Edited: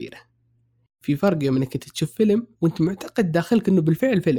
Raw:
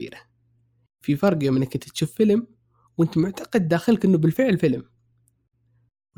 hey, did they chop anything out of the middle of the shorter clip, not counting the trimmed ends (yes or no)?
yes